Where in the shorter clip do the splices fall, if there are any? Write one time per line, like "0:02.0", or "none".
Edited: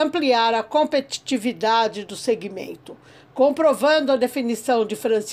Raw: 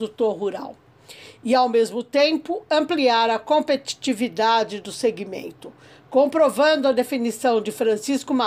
none